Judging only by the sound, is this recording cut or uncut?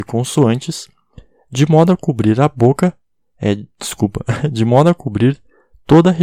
uncut